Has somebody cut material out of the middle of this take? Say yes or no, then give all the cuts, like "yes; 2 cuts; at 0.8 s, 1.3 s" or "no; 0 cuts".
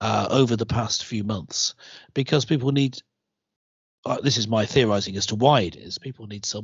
no; 0 cuts